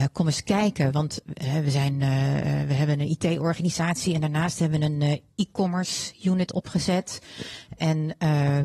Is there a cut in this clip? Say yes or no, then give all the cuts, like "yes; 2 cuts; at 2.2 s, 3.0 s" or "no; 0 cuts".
no; 0 cuts